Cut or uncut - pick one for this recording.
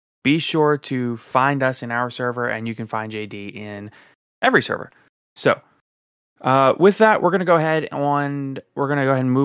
uncut